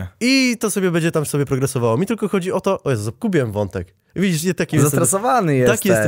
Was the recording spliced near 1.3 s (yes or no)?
yes